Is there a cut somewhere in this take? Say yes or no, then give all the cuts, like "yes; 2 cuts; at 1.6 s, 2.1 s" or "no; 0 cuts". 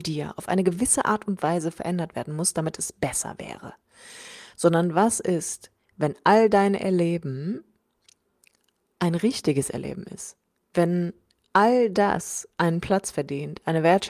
no; 0 cuts